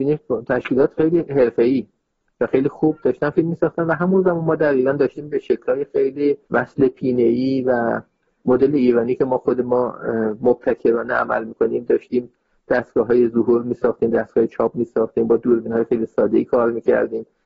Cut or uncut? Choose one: cut